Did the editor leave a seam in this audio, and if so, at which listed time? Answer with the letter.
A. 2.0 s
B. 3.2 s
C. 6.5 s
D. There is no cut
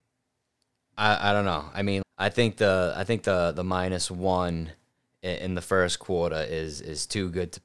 A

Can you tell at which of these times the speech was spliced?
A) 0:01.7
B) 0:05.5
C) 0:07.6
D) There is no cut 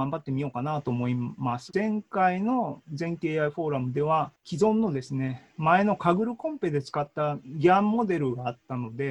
A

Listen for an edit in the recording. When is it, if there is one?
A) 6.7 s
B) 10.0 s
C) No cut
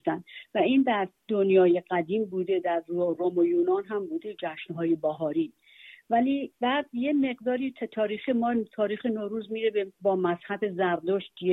B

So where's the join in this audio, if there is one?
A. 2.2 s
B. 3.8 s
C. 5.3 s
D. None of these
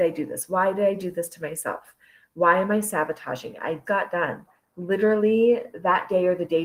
B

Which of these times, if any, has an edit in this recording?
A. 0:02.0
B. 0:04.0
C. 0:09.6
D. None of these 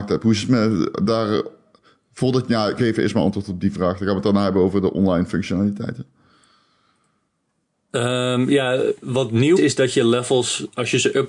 C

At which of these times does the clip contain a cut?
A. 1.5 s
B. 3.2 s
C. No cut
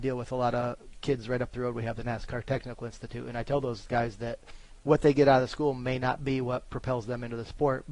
C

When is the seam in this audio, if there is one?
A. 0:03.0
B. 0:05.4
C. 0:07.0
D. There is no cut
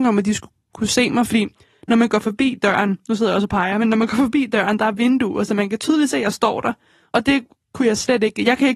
D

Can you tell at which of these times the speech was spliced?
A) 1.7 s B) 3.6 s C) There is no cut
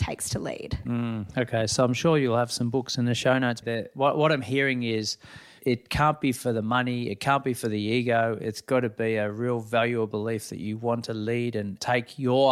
B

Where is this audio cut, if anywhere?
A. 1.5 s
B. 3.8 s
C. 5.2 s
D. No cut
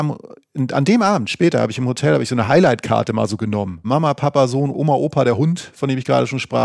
B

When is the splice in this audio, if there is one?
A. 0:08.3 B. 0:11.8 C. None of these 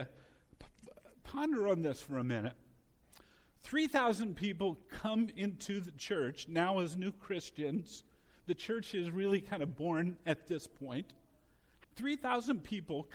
B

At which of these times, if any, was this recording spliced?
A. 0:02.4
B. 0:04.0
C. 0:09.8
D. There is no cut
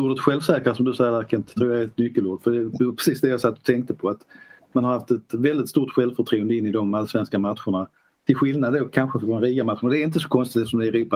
D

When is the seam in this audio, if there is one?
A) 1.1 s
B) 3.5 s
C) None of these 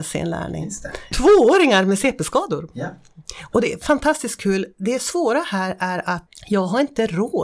A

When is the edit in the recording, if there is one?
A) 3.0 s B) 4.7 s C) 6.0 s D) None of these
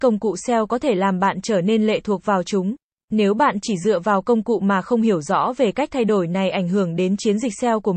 A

